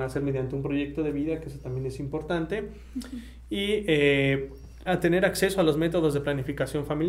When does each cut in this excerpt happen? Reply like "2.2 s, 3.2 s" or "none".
4.9 s